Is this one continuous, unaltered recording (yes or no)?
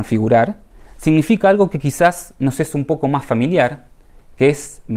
yes